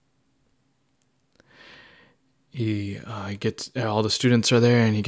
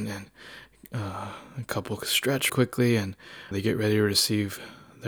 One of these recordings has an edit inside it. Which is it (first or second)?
second